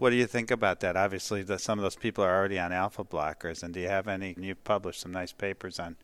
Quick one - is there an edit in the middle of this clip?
yes; 1 cut; at 4.4 s

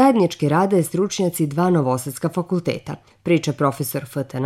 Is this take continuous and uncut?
no; 1 cut; at 3.1 s

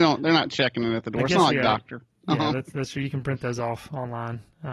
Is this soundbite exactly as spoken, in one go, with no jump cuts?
yes; 0 cuts

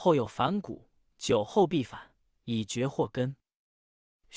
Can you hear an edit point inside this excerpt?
yes; 1 cut; at 2.3 s

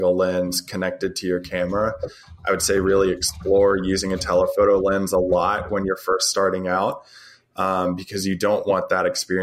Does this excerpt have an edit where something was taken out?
no; 0 cuts

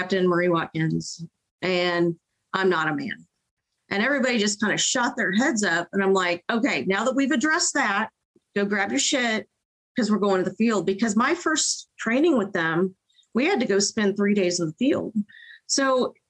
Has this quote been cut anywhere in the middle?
no; 0 cuts

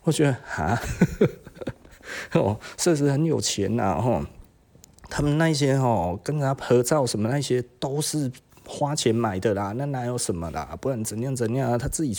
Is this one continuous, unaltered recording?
yes; 0 cuts

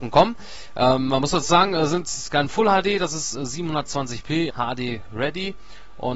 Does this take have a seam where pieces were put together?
yes; 1 cut; at 4.5 s

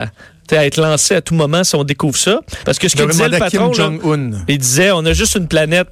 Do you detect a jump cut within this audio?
yes; 1 cut; at 2.6 s

